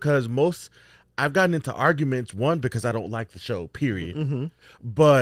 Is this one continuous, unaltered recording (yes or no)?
yes